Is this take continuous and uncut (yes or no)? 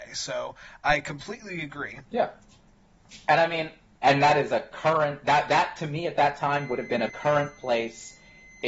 no